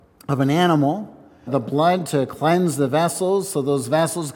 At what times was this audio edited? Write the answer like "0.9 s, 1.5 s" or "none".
1.5 s